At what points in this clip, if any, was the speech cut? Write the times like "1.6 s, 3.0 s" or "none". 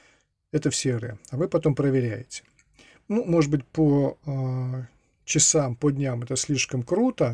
none